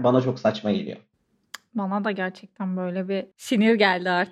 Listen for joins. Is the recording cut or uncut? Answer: cut